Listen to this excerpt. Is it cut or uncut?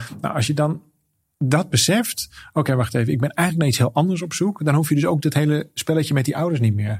uncut